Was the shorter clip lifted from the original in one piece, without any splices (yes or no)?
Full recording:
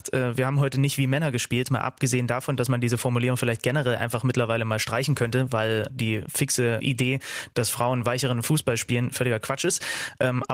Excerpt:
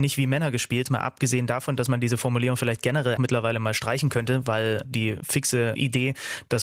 no